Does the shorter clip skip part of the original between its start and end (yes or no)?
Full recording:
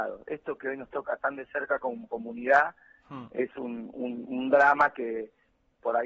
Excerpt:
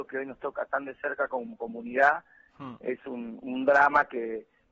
yes